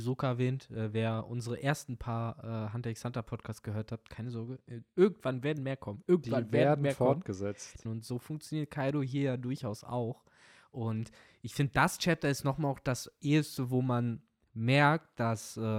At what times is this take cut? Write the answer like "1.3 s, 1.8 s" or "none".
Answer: 7.8 s